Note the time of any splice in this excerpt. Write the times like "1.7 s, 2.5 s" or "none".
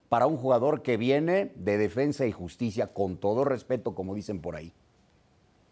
none